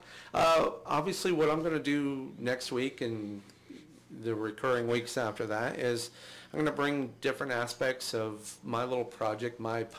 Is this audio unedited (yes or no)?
yes